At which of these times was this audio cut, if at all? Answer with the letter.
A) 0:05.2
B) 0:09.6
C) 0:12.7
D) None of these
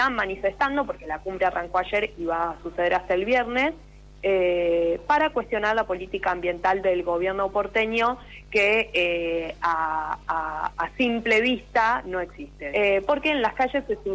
C